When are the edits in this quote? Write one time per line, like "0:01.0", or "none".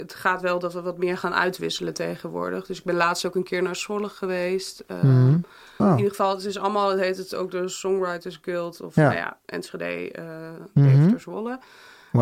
0:05.8